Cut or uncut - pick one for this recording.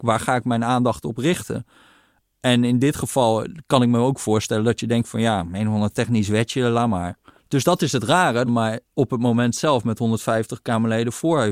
cut